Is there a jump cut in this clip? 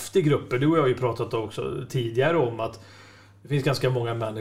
no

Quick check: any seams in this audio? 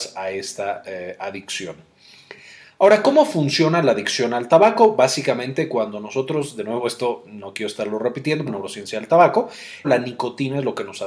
yes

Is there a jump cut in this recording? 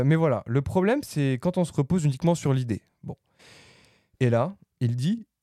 no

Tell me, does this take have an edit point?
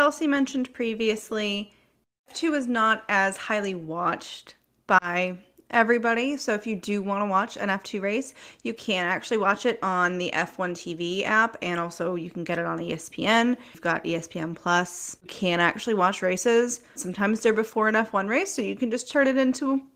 yes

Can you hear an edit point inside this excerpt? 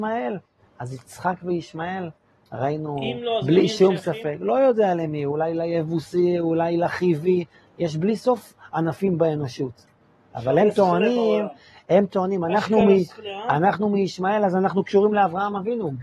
no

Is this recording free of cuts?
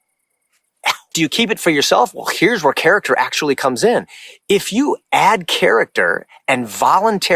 no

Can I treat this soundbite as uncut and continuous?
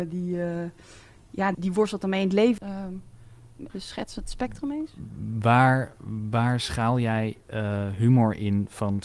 no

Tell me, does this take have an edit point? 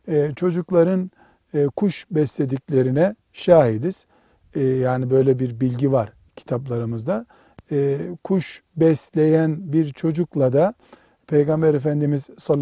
no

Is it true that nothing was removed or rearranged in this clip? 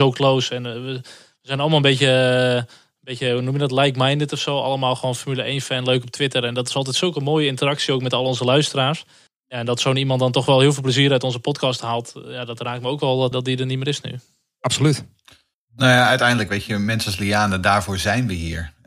no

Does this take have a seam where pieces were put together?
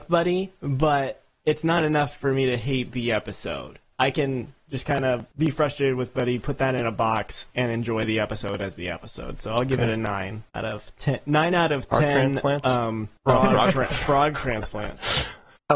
no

